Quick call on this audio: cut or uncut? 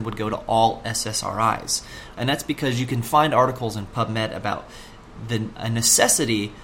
cut